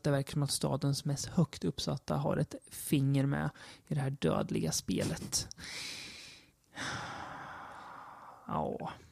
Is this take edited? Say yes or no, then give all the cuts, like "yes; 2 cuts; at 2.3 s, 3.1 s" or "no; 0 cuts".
no; 0 cuts